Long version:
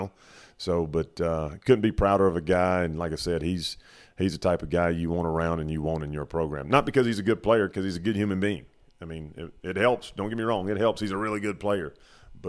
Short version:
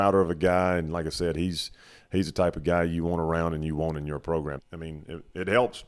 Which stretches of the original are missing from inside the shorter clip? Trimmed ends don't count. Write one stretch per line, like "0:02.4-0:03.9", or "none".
0:06.6-0:08.9